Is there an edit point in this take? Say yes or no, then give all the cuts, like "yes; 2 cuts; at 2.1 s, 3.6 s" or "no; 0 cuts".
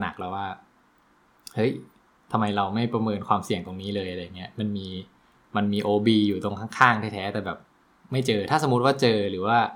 no; 0 cuts